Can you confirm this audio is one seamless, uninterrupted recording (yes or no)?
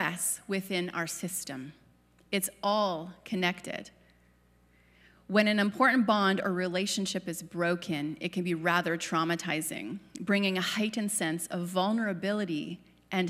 yes